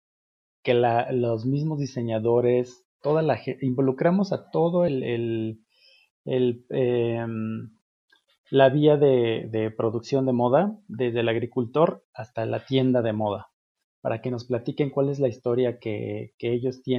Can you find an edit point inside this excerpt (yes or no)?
no